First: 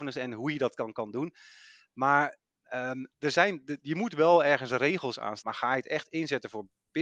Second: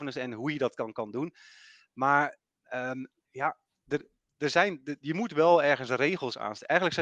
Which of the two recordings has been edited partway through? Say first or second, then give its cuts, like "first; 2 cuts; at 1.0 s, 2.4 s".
first; 2 cuts; at 3.1 s, 5.4 s